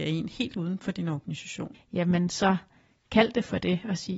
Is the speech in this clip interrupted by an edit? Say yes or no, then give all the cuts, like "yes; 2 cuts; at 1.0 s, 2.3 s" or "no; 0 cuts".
yes; 1 cut; at 1.7 s